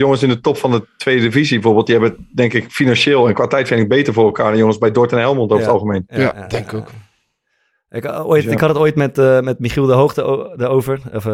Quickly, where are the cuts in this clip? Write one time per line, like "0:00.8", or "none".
none

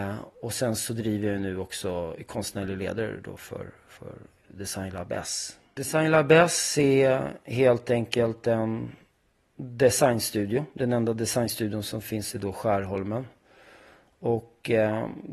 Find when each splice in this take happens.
none

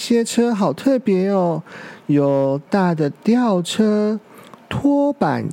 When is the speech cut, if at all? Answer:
0:02.7

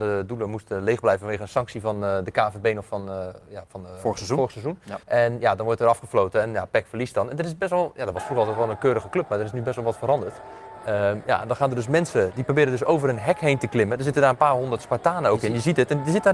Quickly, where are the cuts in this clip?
0:05.0

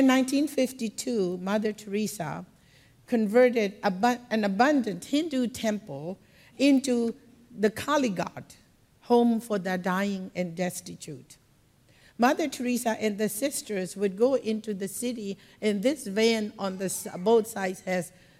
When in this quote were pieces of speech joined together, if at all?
none

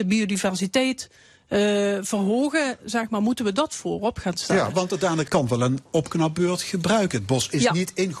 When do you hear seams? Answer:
0:05.3

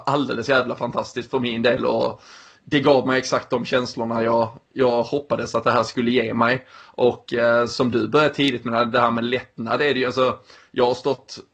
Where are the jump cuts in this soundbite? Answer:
none

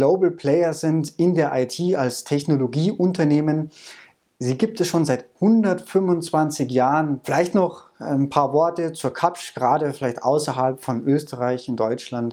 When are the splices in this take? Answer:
0:07.2

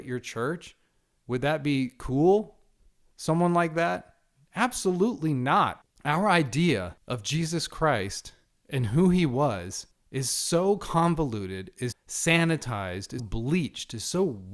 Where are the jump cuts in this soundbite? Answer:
0:01.2
0:11.9
0:13.2

